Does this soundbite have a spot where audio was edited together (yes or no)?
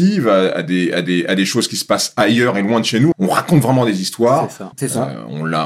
yes